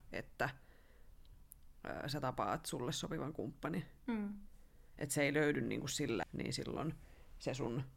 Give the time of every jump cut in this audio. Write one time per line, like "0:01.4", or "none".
0:06.2